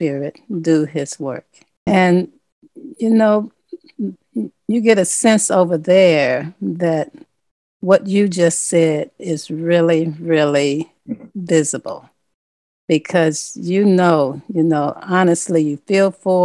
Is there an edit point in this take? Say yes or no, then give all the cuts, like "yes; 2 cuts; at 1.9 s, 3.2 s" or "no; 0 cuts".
yes; 1 cut; at 1.9 s